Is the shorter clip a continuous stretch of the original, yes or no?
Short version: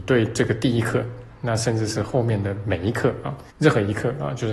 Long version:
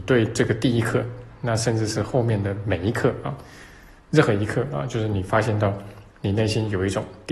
no